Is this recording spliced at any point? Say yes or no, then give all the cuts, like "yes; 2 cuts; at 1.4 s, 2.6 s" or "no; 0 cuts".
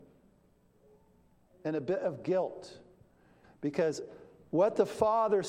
yes; 1 cut; at 3.4 s